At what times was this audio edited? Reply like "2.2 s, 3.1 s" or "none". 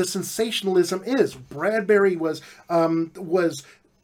none